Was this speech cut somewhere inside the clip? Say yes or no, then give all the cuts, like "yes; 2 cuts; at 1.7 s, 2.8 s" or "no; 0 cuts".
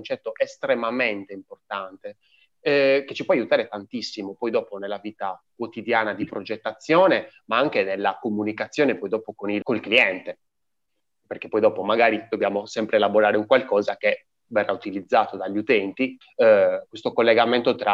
yes; 2 cuts; at 9.6 s, 16.2 s